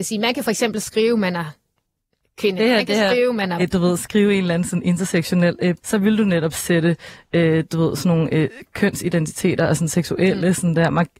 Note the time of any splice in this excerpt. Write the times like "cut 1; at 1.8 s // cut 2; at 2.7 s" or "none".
cut 1; at 3.6 s // cut 2; at 5.8 s